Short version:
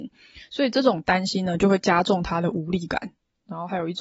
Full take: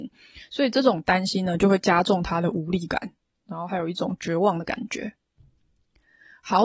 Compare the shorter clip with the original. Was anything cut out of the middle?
no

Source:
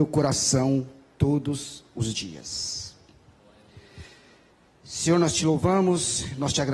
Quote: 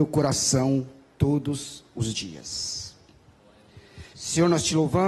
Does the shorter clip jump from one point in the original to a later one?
yes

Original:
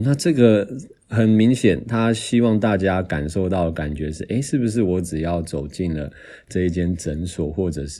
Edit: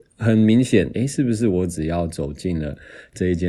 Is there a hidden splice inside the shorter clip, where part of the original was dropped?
yes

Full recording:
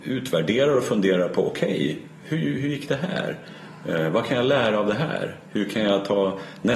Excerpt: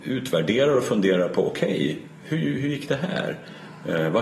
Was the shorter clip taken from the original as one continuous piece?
yes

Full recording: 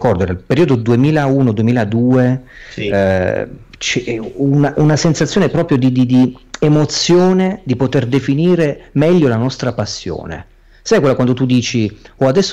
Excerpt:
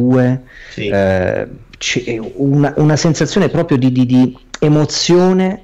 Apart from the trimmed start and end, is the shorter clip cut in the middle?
no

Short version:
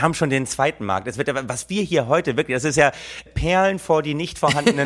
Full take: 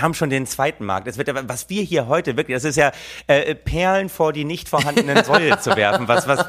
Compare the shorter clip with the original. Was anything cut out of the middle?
yes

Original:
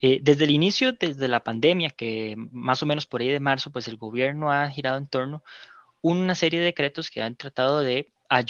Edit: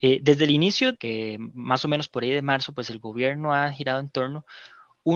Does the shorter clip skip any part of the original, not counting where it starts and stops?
yes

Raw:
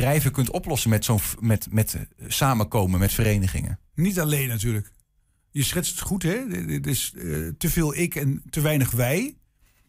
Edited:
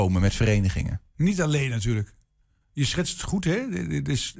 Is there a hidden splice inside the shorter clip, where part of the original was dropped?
no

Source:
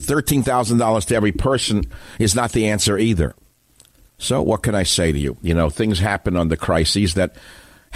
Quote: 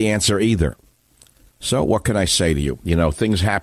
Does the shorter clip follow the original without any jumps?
yes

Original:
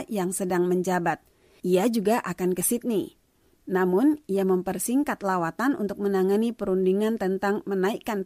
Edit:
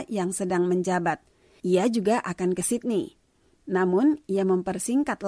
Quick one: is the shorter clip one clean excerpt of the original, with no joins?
yes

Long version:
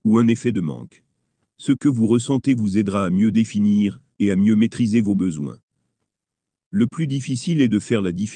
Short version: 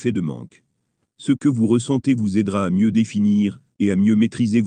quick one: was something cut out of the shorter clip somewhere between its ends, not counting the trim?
no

